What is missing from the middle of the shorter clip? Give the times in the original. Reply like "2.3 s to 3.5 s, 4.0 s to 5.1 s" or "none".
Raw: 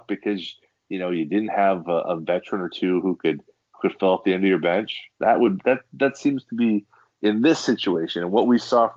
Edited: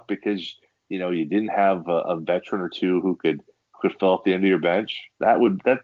none